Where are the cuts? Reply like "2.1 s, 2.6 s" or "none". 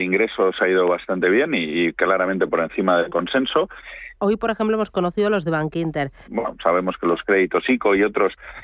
4.2 s, 6.3 s